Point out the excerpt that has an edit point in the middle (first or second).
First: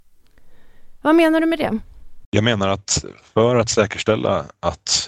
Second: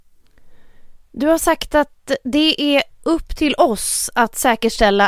first